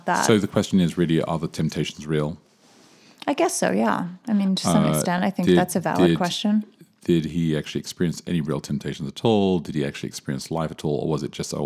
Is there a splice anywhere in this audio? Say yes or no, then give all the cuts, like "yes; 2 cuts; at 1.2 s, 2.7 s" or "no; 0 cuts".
no; 0 cuts